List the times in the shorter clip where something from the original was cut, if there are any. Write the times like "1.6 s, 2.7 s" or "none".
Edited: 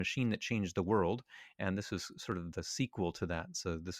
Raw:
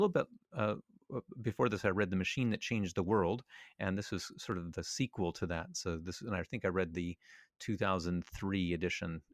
none